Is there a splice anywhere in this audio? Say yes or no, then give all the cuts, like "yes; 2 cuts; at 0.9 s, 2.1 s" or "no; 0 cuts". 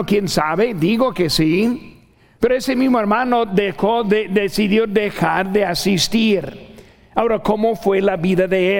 no; 0 cuts